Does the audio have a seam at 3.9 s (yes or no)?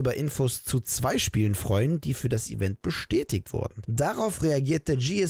yes